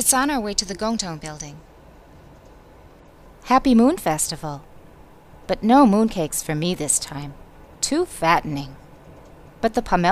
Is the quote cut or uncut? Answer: cut